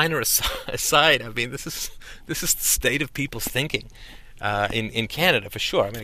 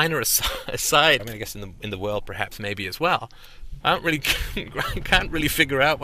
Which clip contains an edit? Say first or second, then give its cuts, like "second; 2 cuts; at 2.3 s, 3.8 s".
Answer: second; 2 cuts; at 1.2 s, 3.8 s